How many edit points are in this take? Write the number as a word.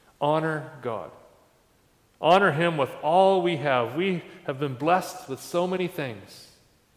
zero